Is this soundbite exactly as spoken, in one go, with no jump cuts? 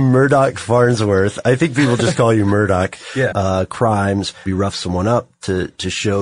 no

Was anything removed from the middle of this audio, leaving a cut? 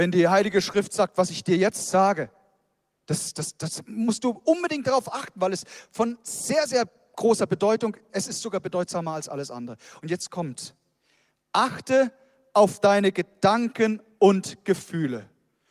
no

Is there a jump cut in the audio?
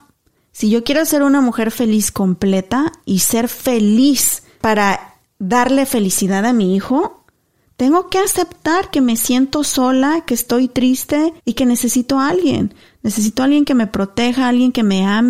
yes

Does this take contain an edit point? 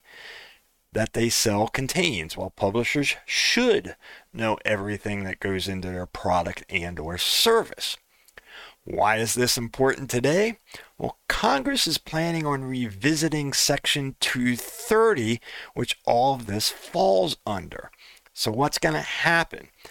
no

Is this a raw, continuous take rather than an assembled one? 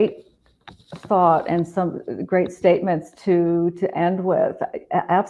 yes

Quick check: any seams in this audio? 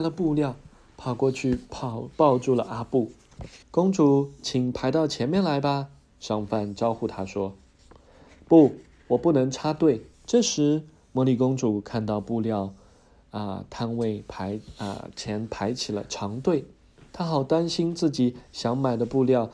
yes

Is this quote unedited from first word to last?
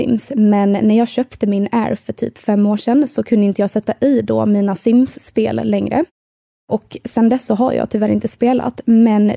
yes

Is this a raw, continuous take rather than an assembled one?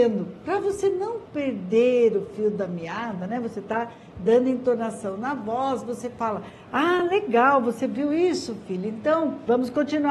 yes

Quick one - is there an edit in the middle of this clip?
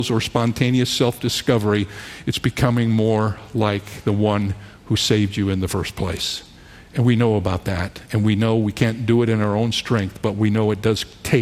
no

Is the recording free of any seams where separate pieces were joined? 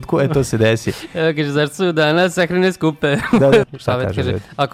no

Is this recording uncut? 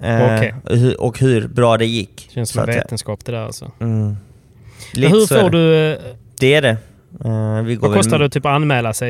no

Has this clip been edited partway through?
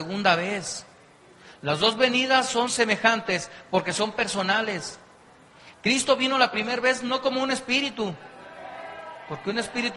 yes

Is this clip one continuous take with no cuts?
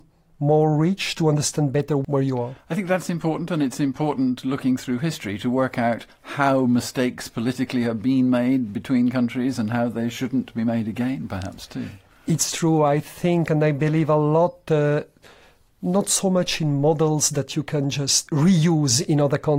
yes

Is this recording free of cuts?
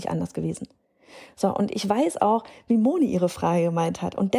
yes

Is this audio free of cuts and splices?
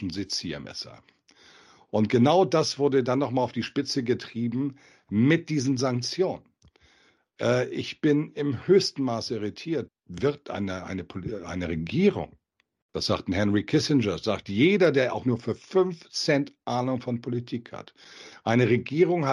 no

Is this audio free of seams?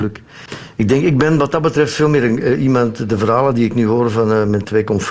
yes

